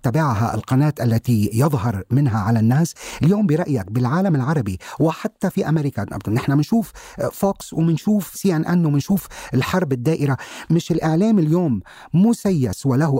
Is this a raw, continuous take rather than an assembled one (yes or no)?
yes